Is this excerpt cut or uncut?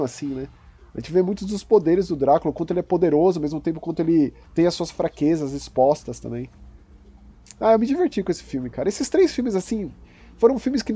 uncut